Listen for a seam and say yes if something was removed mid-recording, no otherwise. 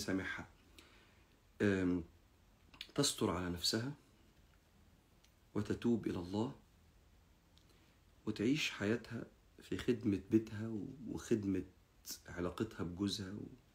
no